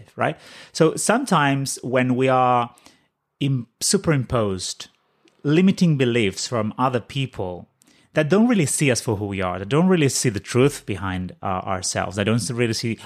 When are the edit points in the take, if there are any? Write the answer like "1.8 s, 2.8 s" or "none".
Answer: none